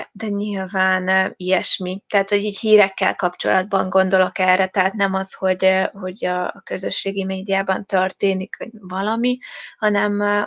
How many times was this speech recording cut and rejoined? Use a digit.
0